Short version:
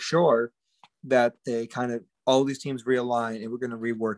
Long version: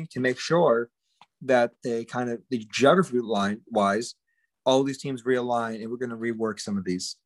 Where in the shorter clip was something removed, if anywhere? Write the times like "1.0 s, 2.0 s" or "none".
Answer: 2.1 s